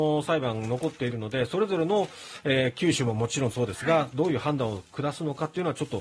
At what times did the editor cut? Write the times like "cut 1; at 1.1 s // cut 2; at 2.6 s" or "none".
none